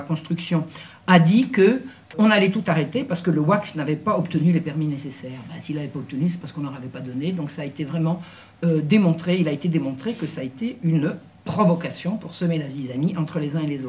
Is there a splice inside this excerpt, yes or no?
yes